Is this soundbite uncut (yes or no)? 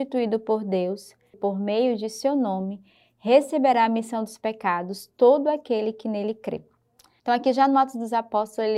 no